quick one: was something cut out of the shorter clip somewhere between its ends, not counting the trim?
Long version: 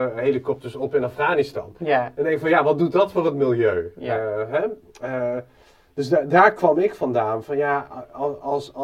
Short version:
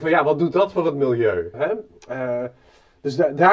yes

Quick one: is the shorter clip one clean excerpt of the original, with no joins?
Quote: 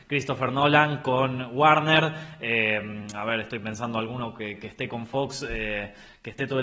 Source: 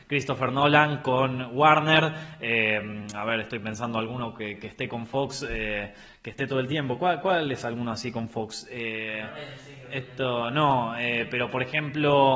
yes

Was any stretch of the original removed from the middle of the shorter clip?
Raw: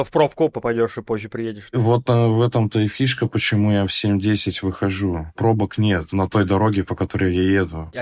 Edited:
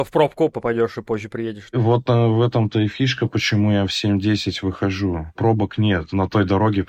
no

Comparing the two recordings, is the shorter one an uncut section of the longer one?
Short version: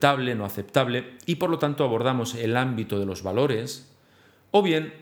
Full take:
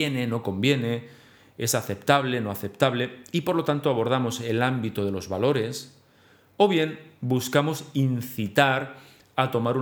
yes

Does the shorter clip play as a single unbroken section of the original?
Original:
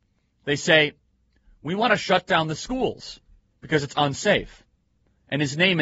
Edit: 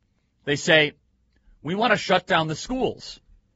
yes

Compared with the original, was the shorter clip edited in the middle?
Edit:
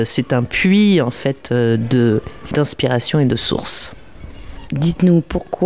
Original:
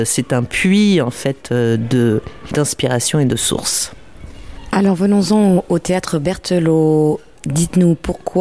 yes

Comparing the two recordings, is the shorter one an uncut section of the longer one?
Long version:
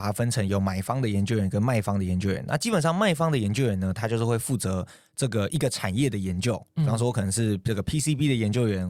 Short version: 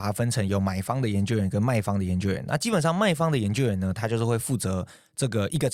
yes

